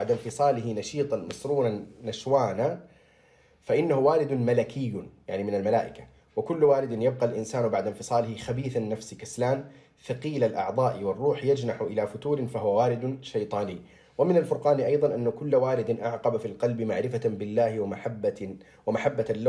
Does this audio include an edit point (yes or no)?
no